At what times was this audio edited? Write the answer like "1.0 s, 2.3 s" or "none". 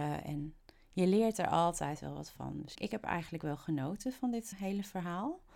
2.7 s, 4.5 s